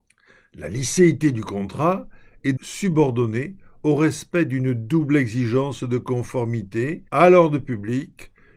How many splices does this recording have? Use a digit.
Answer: 2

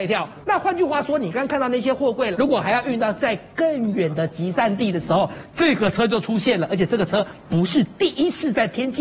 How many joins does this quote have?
1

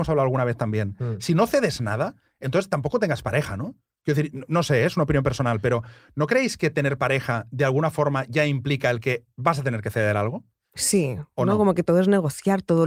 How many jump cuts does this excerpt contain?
0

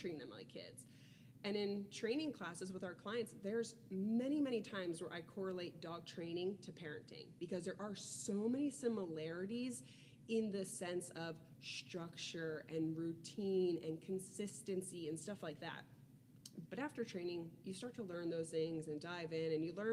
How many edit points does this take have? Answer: 1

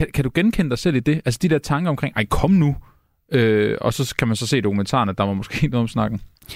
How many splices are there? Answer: 0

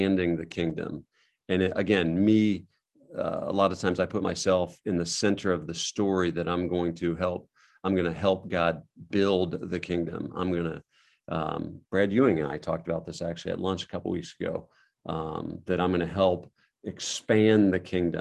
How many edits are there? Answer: 0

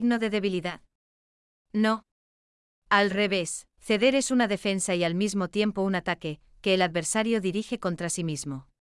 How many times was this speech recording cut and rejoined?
1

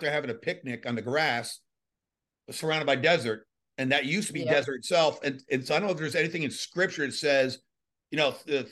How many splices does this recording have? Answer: 0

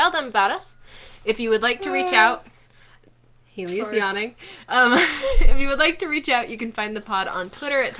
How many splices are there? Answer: 0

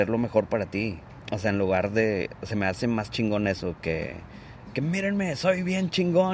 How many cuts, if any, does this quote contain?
0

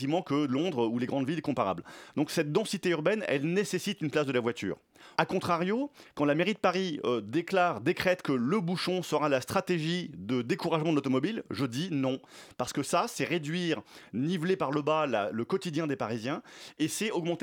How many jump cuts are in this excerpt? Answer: 1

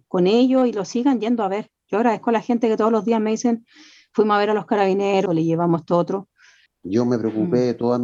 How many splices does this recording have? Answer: 2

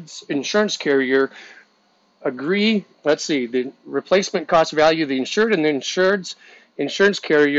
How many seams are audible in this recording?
1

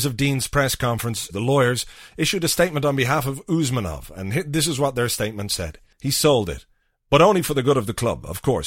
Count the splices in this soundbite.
2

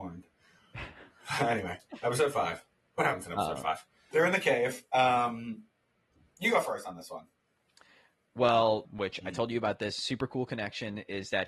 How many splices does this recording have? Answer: 2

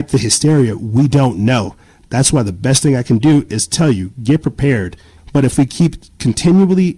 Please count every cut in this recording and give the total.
1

